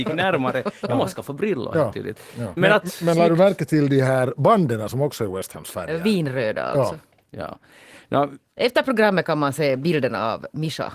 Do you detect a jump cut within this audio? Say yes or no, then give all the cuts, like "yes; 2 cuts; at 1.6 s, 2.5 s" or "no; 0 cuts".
yes; 1 cut; at 2.6 s